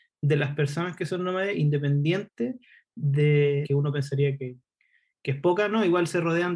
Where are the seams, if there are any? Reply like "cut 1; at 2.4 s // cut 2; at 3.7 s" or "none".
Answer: cut 1; at 3.6 s